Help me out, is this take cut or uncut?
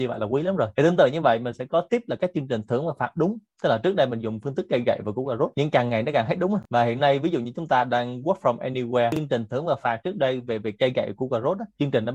uncut